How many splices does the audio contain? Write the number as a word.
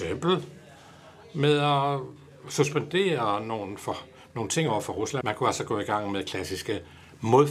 one